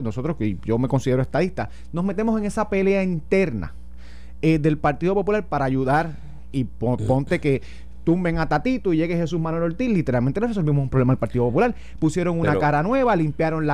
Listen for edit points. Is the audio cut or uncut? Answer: uncut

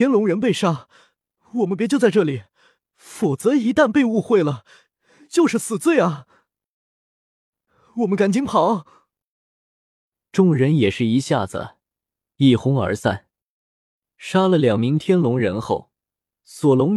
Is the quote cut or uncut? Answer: uncut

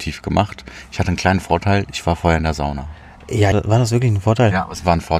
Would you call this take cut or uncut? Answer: cut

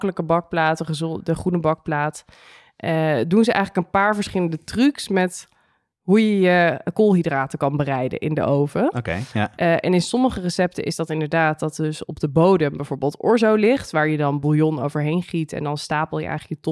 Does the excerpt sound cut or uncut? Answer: uncut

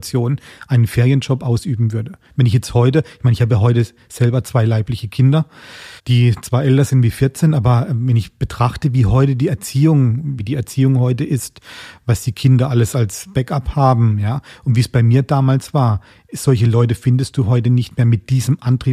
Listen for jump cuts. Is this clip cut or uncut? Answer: cut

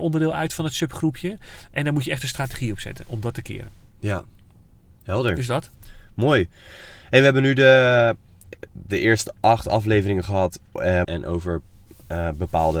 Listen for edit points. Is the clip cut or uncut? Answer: cut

